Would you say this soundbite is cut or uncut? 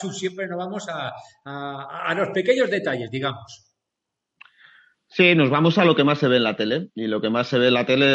uncut